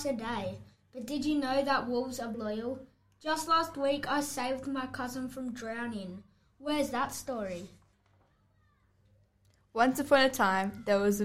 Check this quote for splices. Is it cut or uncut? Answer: cut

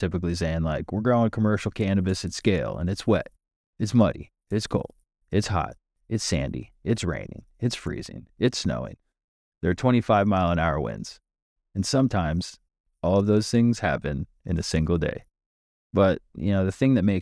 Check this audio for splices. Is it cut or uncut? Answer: uncut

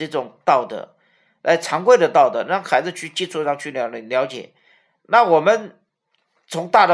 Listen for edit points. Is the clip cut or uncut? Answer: uncut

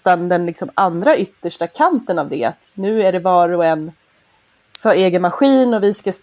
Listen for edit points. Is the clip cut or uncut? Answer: uncut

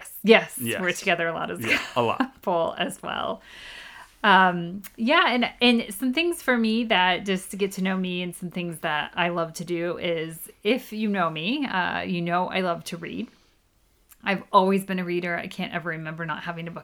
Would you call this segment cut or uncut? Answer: uncut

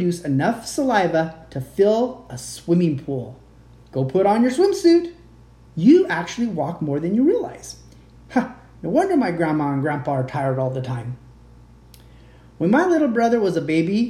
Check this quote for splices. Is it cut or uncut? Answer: cut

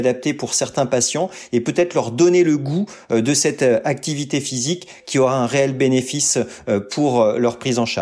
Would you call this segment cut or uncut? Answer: uncut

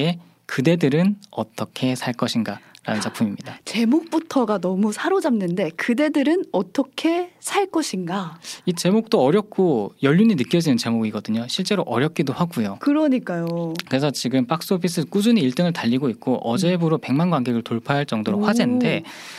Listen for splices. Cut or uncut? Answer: uncut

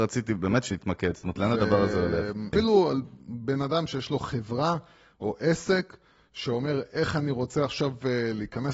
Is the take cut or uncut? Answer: cut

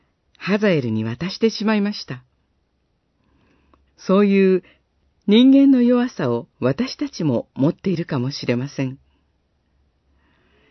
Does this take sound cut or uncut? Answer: cut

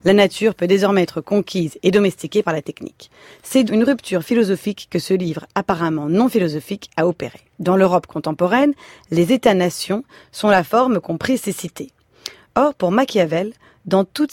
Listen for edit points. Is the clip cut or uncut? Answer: cut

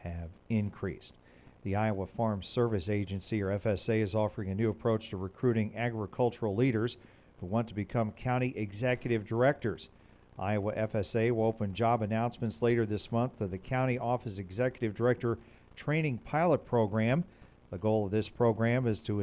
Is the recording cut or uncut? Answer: uncut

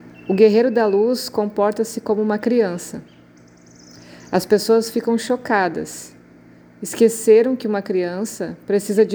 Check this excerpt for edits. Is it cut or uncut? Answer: uncut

